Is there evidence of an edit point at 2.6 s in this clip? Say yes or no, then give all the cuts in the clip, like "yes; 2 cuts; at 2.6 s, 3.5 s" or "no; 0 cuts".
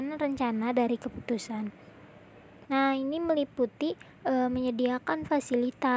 yes; 1 cut; at 2.6 s